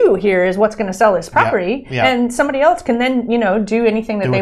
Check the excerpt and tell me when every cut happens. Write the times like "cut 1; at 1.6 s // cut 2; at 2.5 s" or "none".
none